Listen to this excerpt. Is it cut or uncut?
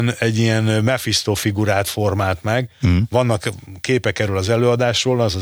uncut